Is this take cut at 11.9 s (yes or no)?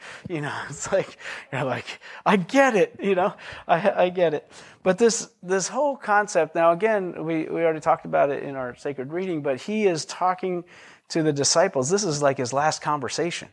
no